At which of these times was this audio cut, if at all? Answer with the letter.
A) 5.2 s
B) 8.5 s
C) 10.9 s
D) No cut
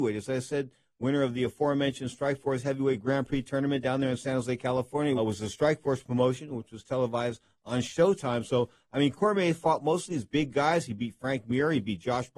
A